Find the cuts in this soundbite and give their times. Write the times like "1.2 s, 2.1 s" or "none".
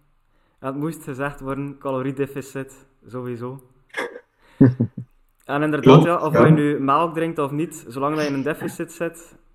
none